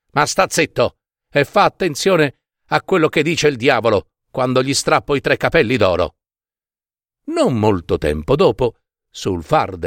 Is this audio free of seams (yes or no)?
yes